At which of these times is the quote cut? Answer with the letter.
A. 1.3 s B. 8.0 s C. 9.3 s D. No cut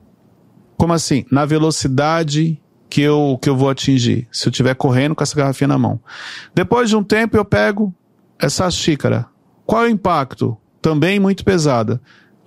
D